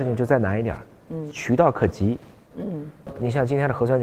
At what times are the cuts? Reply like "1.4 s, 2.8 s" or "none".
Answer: 2.5 s